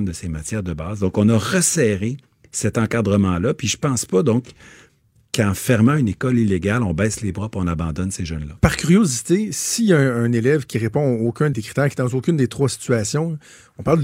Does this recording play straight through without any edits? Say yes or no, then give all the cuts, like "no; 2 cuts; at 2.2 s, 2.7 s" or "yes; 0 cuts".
no; 2 cuts; at 8.6 s, 11.5 s